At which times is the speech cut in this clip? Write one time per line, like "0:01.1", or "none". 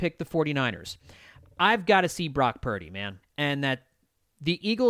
0:03.2